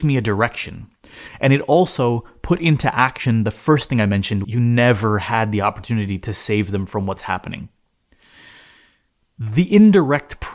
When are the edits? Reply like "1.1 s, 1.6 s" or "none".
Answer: 4.4 s